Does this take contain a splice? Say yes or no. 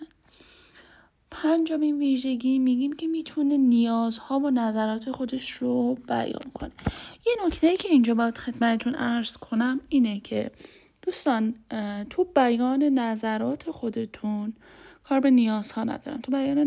no